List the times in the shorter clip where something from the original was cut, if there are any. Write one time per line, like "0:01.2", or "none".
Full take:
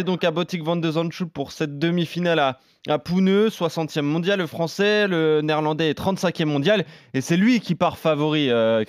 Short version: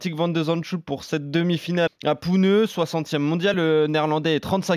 0:01.9
0:03.5